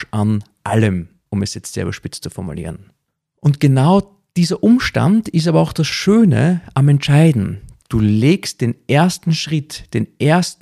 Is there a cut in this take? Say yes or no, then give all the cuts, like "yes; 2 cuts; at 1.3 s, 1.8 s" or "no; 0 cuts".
yes; 1 cut; at 7.8 s